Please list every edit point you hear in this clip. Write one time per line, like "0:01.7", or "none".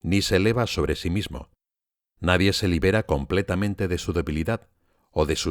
none